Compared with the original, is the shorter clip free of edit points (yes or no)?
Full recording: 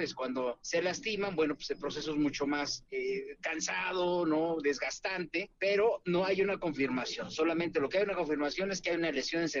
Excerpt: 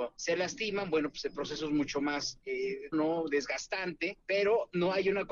no